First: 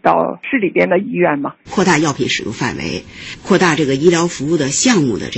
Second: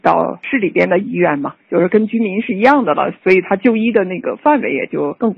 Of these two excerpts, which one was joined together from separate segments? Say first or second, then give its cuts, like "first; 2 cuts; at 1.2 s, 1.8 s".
first; 1 cut; at 1.7 s